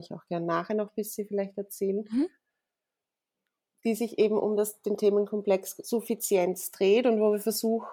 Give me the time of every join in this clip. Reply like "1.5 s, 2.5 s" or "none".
none